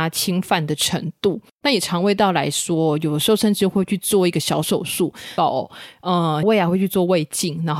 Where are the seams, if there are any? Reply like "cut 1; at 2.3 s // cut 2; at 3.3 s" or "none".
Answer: cut 1; at 5.4 s // cut 2; at 6.4 s